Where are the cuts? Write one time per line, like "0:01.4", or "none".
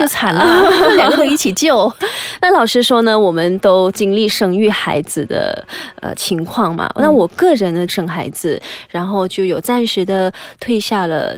0:07.9